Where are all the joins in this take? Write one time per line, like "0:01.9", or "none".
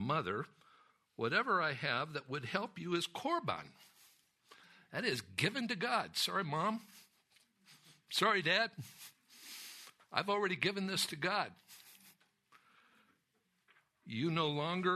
none